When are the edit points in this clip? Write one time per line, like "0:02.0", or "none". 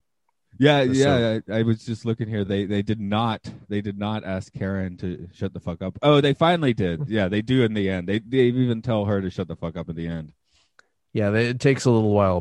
none